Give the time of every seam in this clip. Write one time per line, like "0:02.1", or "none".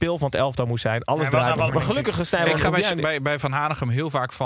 0:01.7